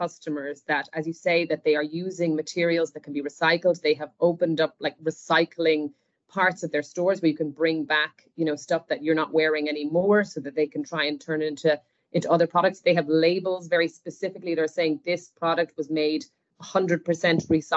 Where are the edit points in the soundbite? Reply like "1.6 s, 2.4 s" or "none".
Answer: none